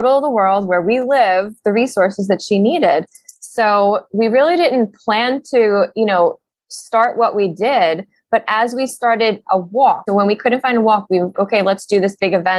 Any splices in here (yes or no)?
yes